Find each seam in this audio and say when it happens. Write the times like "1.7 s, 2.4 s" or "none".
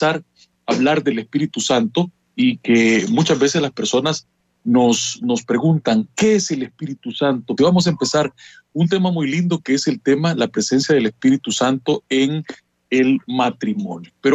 7.6 s